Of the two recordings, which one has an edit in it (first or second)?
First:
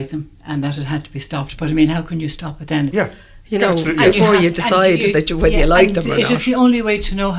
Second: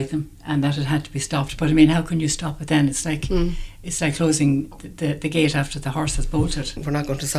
first